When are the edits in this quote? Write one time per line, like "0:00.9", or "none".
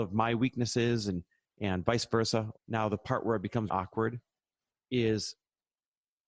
0:02.6
0:03.7